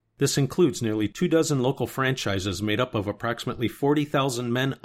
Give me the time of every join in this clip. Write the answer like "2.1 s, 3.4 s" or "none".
none